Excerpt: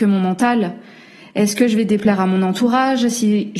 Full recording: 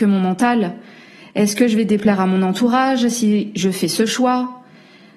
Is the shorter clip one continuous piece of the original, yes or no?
yes